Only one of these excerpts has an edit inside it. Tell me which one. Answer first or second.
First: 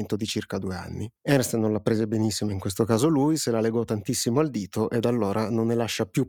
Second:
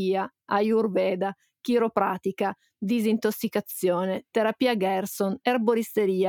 first